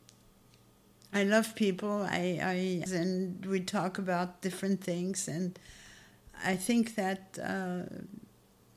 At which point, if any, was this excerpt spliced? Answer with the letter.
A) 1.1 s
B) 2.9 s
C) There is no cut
B